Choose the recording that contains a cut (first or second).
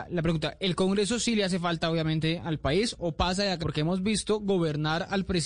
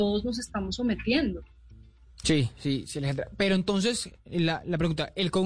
first